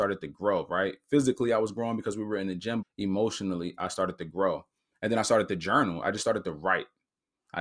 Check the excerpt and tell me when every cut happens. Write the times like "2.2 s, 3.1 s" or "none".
2.8 s